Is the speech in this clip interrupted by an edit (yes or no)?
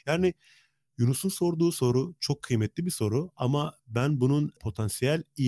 no